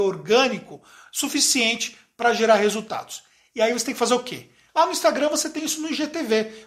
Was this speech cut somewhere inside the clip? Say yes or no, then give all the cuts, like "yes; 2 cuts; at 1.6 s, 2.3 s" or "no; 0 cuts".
yes; 1 cut; at 4.7 s